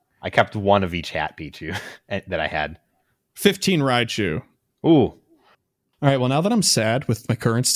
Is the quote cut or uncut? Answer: uncut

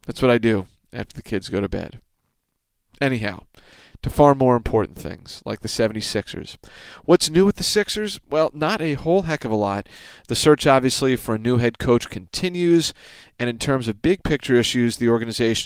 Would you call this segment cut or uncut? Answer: uncut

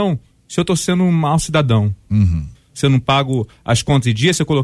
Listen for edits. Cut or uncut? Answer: cut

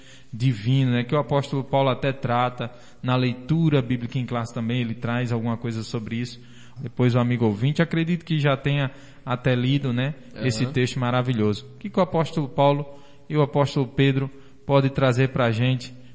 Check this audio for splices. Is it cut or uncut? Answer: cut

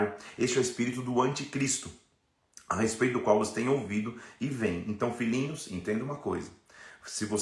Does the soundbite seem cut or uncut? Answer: uncut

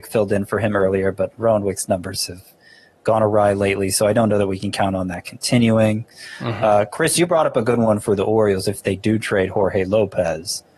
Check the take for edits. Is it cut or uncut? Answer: uncut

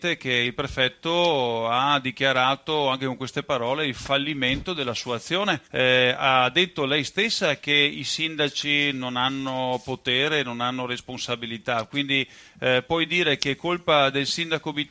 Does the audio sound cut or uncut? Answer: cut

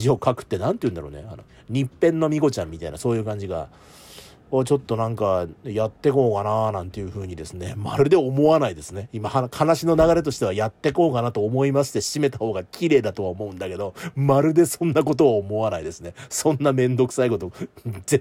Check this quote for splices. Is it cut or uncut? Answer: uncut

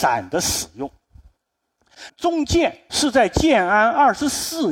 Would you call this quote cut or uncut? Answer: cut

